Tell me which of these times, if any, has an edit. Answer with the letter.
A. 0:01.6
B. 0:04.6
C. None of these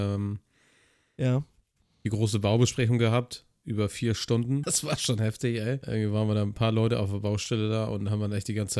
B